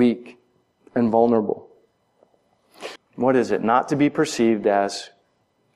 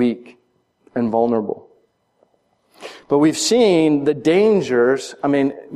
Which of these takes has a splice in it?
first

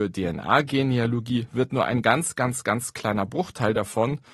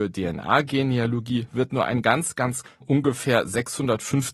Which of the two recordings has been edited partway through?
second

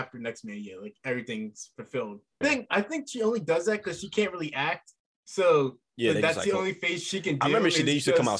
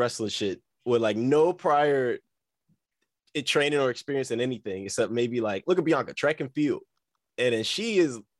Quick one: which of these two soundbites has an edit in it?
first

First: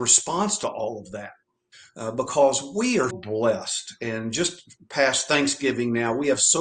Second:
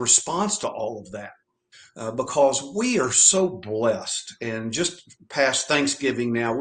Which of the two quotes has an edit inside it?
first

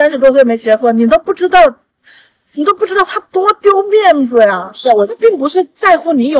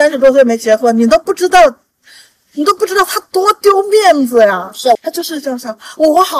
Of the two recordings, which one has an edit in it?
second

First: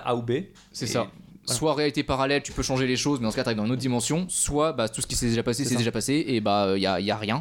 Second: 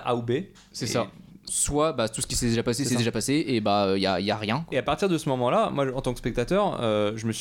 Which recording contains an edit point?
second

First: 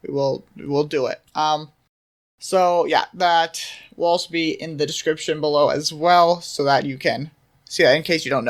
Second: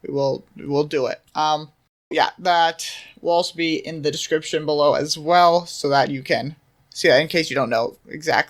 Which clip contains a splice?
second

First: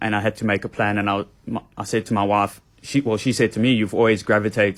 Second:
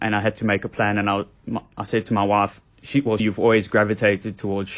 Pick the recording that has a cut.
second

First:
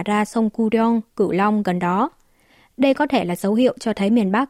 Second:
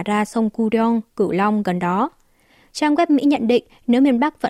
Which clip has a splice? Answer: second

